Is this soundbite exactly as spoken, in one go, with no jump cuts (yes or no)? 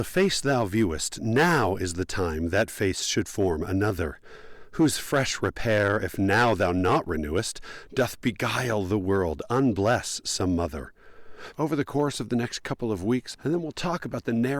no